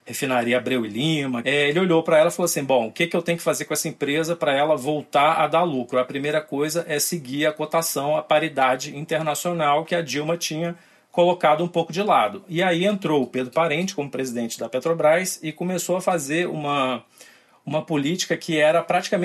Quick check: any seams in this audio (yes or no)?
no